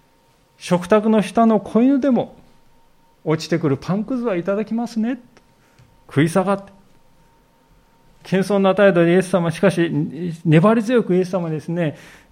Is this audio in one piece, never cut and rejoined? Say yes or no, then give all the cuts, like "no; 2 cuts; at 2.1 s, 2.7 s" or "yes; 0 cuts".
yes; 0 cuts